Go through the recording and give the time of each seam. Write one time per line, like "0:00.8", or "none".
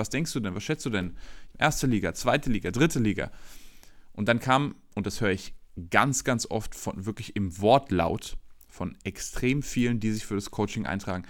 0:01.5